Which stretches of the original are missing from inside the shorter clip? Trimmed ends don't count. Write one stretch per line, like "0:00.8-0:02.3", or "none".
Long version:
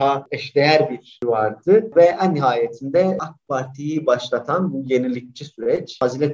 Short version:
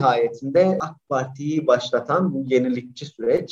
none